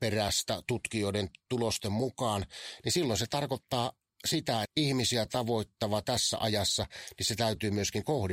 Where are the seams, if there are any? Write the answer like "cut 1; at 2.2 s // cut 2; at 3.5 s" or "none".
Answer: cut 1; at 2.8 s // cut 2; at 4.6 s